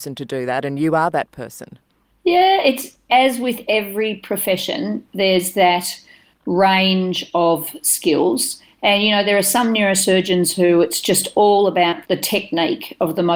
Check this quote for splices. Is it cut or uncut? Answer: uncut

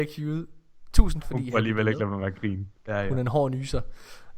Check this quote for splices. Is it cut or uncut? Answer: cut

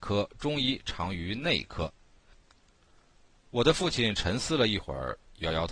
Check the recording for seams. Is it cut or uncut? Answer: cut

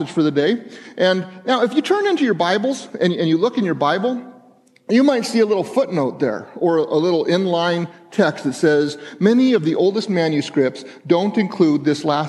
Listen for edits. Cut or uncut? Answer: uncut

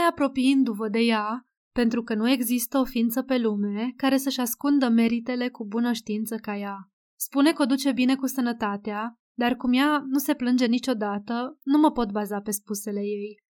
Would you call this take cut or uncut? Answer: cut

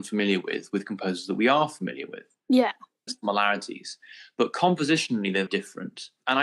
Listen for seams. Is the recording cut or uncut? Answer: cut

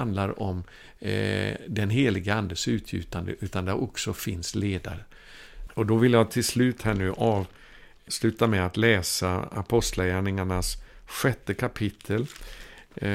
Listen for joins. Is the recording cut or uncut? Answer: cut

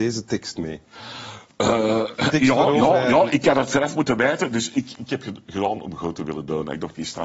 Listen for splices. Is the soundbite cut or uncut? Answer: uncut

